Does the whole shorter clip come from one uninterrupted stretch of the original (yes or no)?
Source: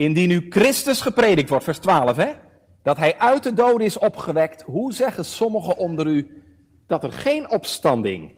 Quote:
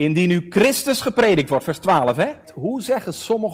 no